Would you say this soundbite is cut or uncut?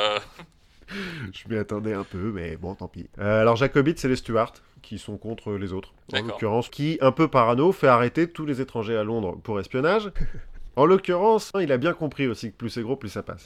cut